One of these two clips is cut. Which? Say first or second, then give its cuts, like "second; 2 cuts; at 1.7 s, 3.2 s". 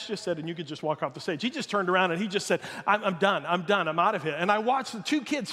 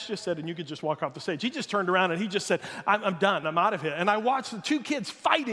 second; 1 cut; at 3.4 s